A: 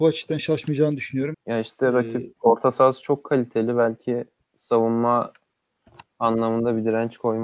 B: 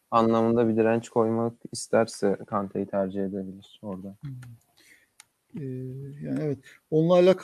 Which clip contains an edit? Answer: A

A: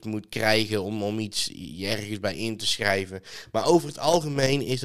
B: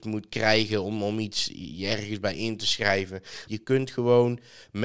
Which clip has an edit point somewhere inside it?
B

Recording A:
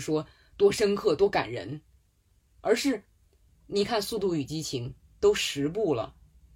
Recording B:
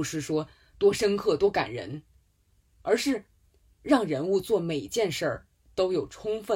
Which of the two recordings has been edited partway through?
A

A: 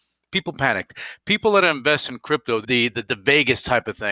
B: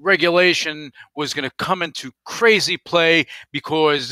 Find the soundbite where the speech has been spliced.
A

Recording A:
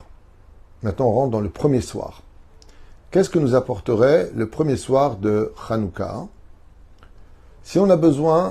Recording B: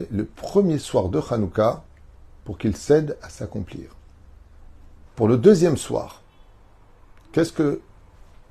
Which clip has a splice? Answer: B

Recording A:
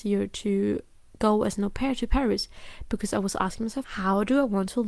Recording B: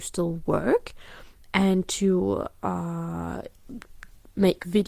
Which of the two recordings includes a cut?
A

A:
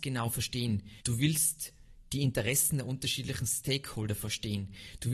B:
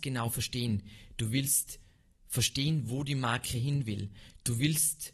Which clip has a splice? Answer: A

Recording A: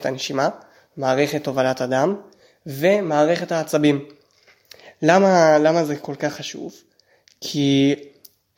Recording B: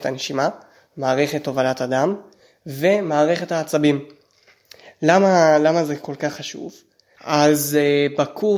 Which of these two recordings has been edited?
B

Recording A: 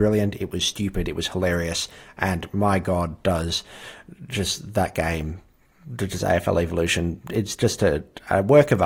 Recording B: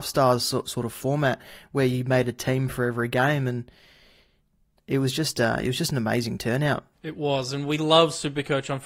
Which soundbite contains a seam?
B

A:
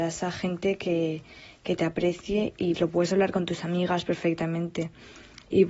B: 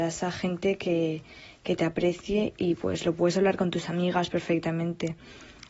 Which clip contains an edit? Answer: A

